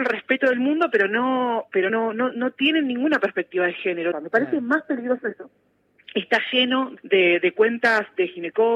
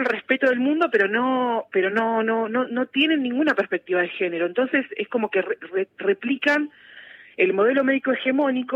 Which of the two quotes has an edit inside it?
first; 3 cuts; at 1.9 s, 4.1 s, 7.0 s

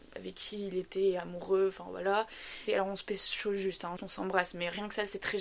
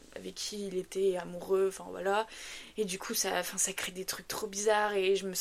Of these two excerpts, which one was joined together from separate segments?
first; 2 cuts; at 2.7 s, 4.0 s

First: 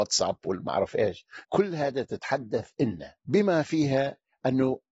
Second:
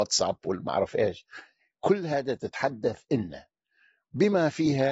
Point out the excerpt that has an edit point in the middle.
first; 2 cuts; at 1.4 s, 3.2 s

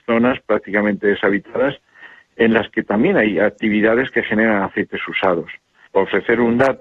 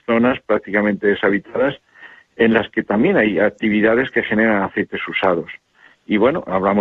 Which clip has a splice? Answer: first; 1 cut; at 5.9 s

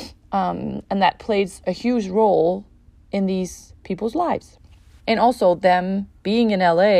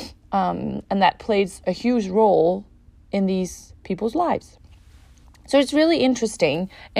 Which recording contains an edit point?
first; 1 cut; at 5.0 s

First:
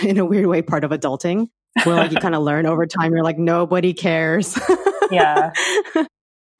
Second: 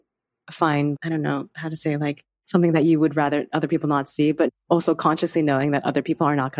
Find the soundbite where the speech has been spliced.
second; 1 cut; at 0.9 s

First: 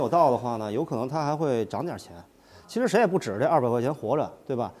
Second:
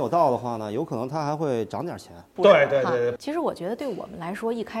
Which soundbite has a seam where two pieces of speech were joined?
second; 1 cut; at 2.4 s

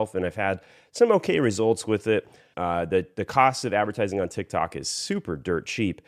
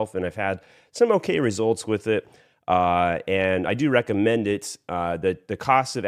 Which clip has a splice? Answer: first; 1 cut; at 2.5 s

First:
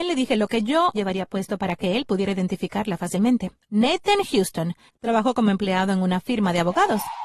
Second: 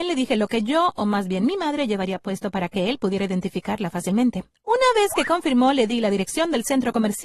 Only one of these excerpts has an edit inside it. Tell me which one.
first; 3 cuts; at 0.9 s, 3.7 s, 4.9 s

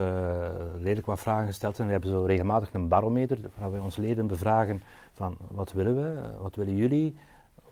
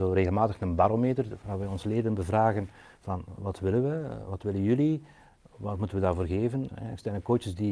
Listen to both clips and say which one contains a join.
second; 1 cut; at 6.7 s

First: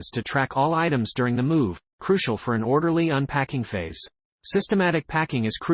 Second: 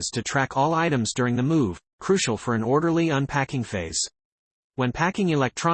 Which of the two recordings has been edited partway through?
first; 1 cut; at 4.4 s

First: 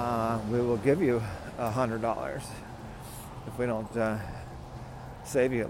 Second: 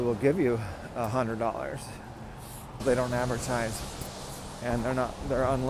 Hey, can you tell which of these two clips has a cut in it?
second; 1 cut; at 2.8 s

